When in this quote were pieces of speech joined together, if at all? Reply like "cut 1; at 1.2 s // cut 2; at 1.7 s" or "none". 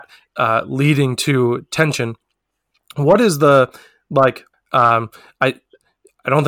cut 1; at 4.5 s